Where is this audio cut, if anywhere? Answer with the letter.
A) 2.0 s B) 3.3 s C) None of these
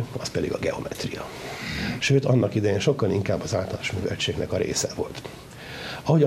A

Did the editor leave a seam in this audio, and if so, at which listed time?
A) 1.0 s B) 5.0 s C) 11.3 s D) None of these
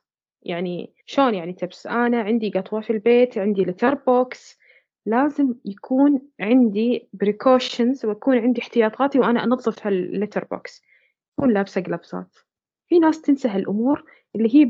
A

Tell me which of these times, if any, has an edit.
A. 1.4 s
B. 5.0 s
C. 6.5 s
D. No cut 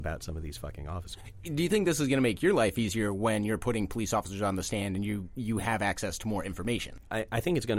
D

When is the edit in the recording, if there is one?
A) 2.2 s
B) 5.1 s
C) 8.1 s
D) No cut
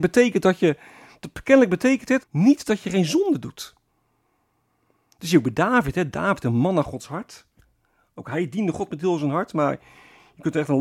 A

